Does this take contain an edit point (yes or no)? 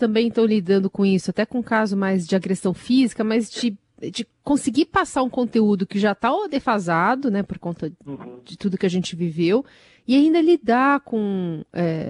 yes